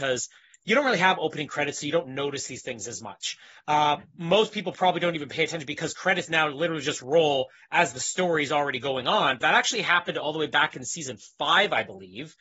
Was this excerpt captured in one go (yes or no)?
no